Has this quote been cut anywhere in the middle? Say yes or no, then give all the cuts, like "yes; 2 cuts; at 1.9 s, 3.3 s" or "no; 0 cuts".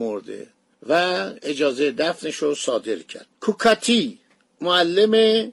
yes; 1 cut; at 3.3 s